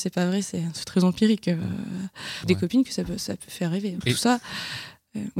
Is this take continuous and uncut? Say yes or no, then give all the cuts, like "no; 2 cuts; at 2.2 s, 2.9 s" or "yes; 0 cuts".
no; 2 cuts; at 2.4 s, 4.0 s